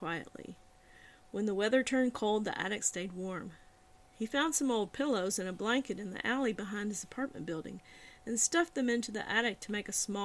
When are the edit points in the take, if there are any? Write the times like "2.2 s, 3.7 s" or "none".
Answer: none